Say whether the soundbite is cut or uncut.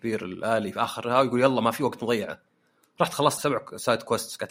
cut